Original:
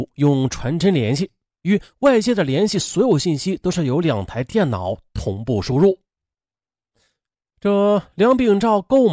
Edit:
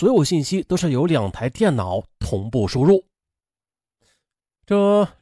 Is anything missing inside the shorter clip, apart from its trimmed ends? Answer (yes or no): no